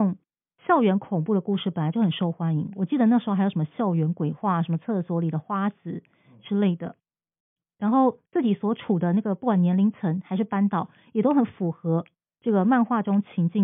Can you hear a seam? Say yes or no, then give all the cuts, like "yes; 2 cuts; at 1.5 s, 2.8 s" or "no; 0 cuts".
no; 0 cuts